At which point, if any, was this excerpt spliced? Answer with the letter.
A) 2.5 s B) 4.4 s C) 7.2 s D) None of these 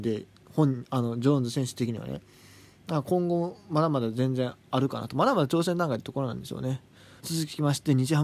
C